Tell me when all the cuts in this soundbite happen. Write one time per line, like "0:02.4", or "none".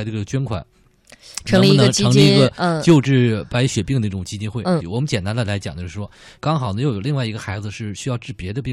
0:04.8
0:06.4